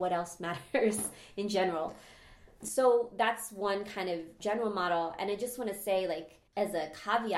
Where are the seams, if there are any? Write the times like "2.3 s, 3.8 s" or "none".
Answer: 6.5 s